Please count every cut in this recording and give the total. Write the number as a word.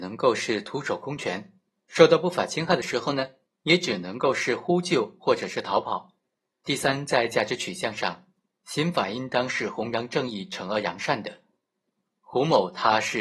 one